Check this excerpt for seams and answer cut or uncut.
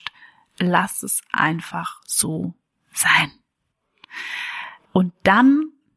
cut